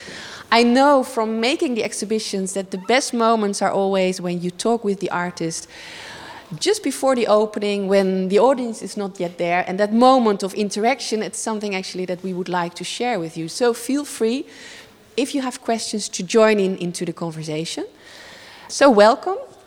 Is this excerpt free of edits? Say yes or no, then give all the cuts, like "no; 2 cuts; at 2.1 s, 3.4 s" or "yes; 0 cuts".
yes; 0 cuts